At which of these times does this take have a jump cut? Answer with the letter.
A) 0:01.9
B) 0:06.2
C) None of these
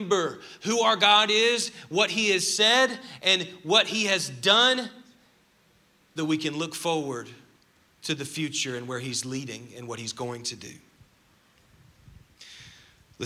B